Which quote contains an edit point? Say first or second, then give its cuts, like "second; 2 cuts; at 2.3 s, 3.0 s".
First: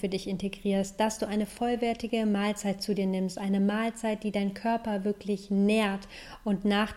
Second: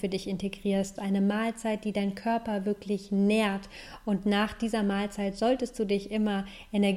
second; 1 cut; at 1.0 s